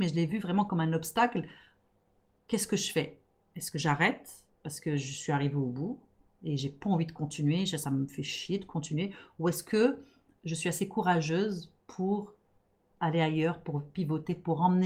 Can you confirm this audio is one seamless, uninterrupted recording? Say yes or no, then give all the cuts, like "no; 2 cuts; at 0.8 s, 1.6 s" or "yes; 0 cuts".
yes; 0 cuts